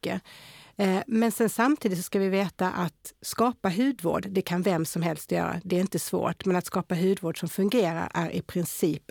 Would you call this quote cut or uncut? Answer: uncut